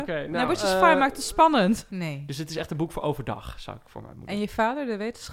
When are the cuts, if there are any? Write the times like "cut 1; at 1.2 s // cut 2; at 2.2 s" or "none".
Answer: cut 1; at 1.9 s